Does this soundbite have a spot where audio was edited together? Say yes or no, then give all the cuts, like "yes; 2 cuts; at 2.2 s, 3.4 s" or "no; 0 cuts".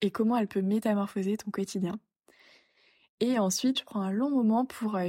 yes; 1 cut; at 3.7 s